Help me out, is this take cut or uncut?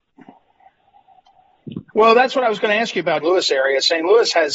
cut